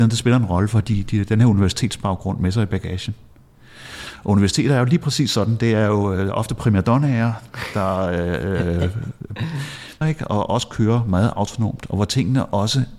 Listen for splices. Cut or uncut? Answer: cut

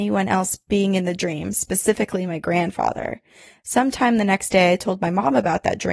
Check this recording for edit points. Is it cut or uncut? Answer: uncut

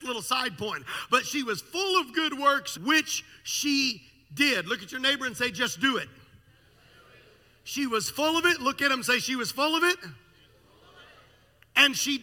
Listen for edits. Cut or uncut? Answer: cut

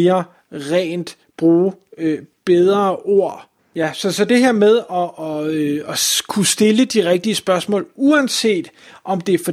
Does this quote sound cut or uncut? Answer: cut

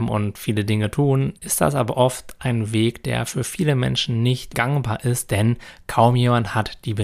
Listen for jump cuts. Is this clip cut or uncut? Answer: cut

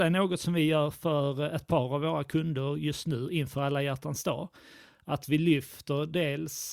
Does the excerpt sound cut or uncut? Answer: uncut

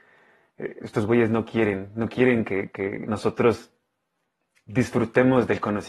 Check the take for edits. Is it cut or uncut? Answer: uncut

